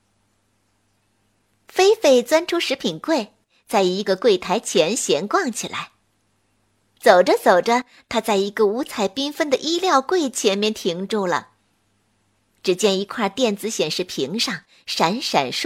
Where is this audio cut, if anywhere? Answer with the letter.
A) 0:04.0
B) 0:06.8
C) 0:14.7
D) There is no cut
A